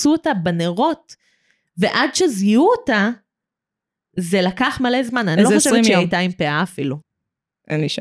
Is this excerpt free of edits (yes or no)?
no